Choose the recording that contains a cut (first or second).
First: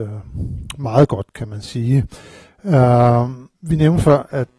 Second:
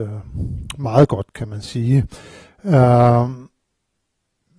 first